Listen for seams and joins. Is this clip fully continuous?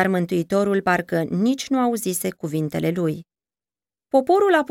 yes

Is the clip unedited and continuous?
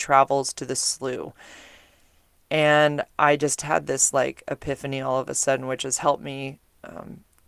yes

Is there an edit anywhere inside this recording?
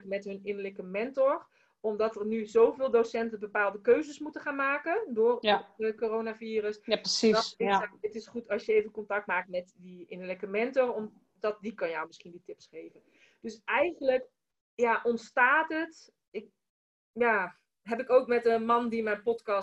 no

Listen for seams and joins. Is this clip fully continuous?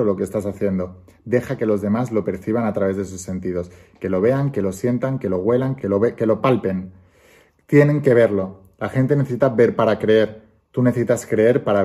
no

